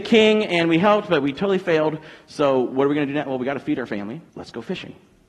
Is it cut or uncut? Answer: cut